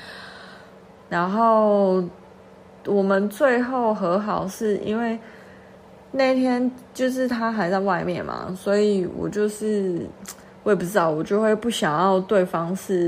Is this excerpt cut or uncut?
cut